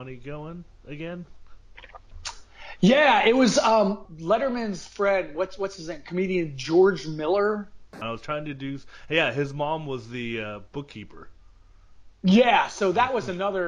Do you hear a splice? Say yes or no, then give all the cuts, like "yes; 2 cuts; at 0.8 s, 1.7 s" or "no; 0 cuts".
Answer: yes; 2 cuts; at 4.1 s, 8.0 s